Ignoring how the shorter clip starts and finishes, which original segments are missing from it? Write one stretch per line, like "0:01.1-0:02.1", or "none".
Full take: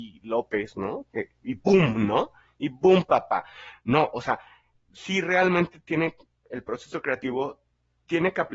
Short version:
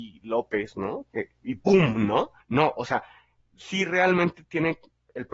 0:02.4-0:03.8

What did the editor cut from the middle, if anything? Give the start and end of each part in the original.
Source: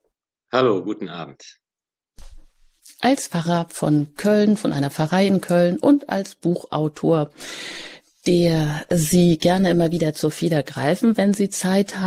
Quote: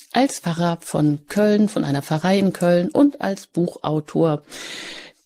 none

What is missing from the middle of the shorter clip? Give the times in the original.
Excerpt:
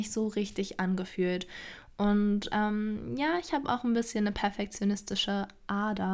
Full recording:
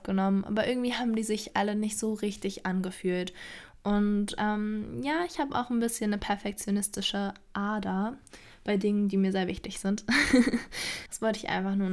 none

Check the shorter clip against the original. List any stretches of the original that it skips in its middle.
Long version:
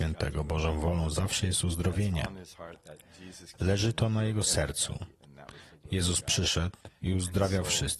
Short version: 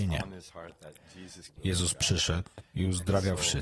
0:03.5-0:05.8

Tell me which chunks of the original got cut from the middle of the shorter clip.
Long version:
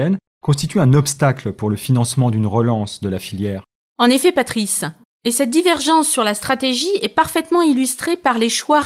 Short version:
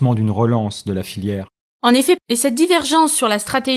0:04.3-0:05.1

